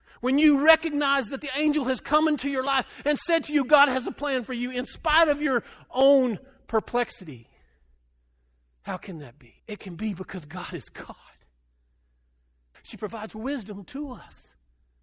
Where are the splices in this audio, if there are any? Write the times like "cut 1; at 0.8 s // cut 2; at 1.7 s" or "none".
cut 1; at 9.6 s // cut 2; at 12.7 s